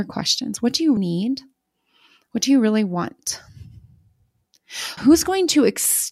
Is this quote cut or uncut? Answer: cut